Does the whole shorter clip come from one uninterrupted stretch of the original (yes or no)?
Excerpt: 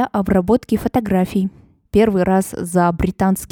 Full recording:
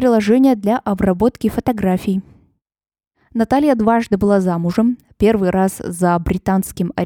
no